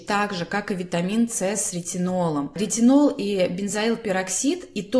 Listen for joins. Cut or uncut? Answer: uncut